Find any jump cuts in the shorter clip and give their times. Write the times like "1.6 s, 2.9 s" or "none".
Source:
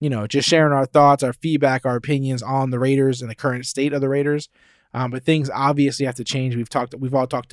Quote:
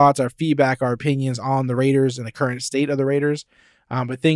none

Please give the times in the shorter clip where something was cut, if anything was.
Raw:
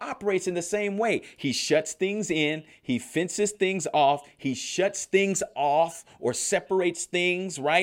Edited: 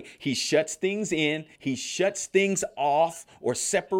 1.5 s

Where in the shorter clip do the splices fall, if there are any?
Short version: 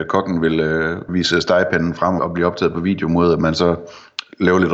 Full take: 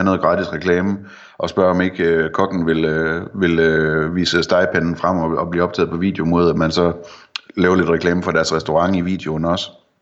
1.1 s, 2.2 s

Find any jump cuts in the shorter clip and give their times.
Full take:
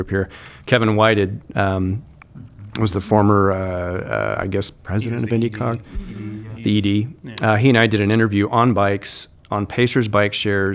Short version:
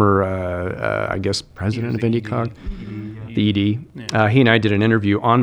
none

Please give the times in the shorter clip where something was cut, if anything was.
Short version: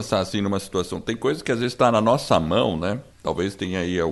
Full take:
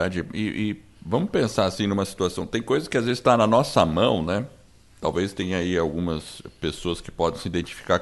3.1 s

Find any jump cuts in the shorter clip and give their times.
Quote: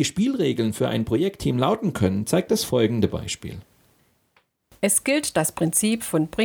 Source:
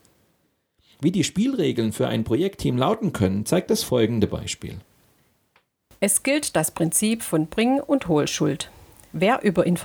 none

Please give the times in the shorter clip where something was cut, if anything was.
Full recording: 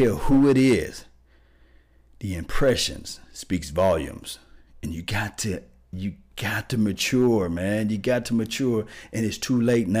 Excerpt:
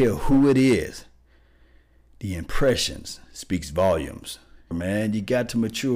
4.7 s

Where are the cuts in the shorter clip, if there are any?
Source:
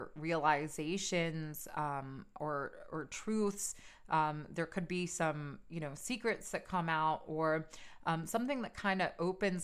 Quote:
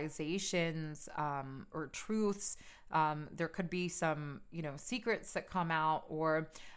1.7 s

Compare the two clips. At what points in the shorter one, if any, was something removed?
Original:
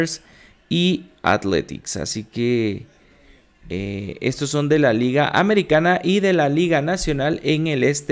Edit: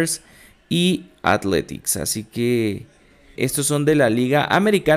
3.4 s

